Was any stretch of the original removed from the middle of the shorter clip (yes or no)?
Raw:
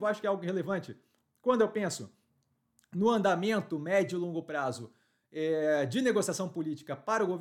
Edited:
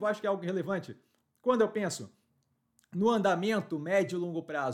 no